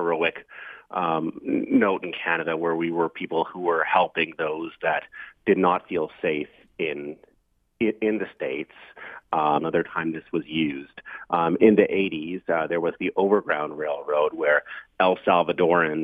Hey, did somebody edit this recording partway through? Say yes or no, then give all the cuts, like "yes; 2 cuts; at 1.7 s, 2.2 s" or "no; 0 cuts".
yes; 1 cut; at 9.6 s